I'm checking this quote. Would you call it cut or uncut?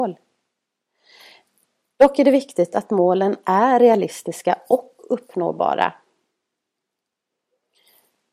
uncut